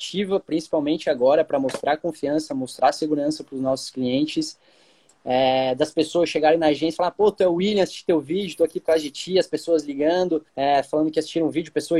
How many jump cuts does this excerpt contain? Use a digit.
2